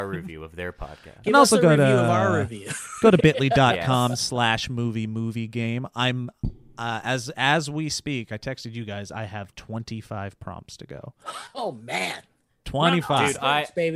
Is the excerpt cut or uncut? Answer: uncut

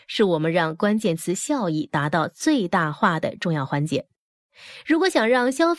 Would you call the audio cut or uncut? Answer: uncut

